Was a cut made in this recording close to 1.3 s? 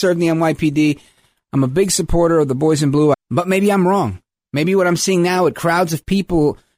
no; 1 cut; at 3.1 s

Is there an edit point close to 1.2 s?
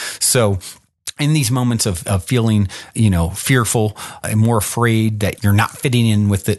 no; 3 cuts; at 2.9 s, 4.2 s, 5.4 s

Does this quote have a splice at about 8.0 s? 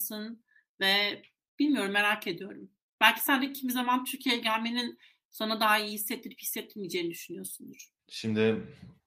yes; 1 cut; at 8.0 s

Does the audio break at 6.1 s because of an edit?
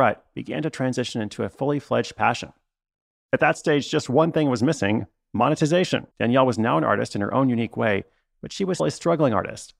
yes; 2 cuts; at 6.1 s, 8.8 s

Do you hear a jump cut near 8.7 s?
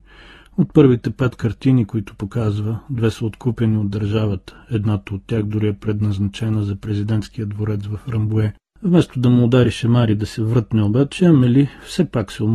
yes; 1 cut; at 8.7 s

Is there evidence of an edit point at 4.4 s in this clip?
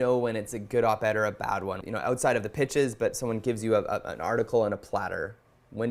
no; 1 cut; at 1.8 s

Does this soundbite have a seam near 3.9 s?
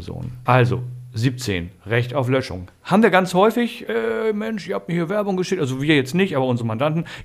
yes; 1 cut; at 3.9 s

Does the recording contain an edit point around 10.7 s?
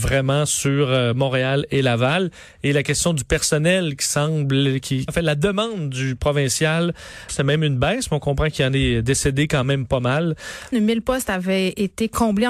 yes; 3 cuts; at 5.1 s, 7.3 s, 10.7 s

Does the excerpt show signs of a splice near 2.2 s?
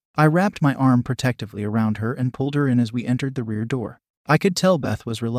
no; 1 cut; at 4.1 s

